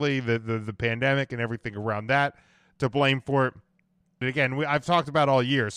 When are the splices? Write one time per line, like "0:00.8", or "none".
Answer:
0:04.2